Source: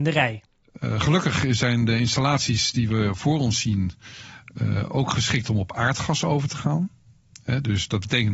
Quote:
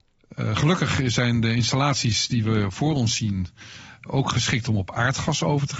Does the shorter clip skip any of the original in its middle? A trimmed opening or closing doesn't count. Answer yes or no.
yes